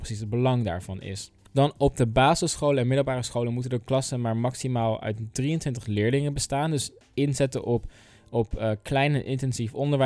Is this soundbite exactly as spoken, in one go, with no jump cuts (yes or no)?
yes